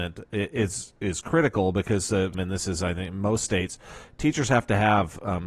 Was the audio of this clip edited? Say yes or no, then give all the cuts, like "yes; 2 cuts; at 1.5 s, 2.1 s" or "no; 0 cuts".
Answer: yes; 1 cut; at 2.3 s